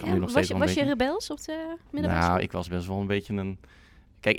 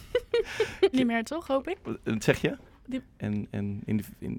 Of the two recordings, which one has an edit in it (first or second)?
second